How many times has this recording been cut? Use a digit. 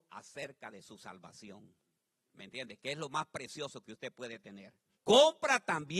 1